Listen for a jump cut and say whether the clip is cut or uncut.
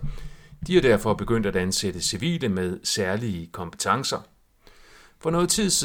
uncut